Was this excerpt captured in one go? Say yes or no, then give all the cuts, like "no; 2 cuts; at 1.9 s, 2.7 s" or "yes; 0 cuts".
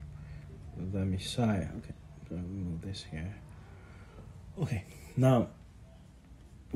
yes; 0 cuts